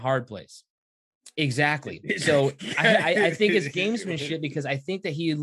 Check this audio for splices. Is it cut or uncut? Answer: cut